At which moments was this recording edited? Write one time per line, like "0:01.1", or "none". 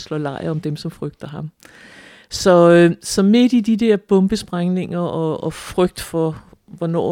none